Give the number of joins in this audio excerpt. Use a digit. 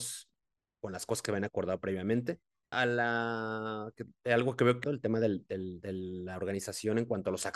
2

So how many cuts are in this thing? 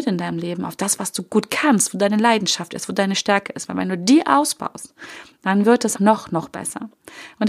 1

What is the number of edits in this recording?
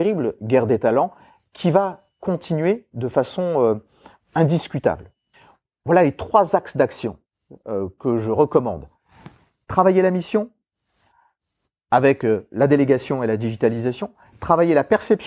0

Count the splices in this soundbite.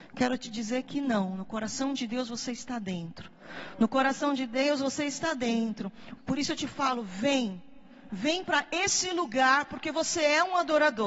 2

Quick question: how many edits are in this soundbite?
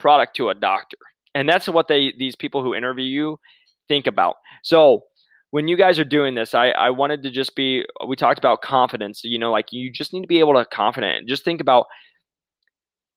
0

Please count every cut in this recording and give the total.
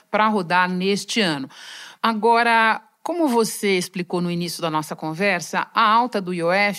1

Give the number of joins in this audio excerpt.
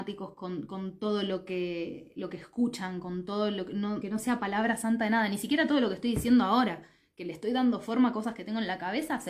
1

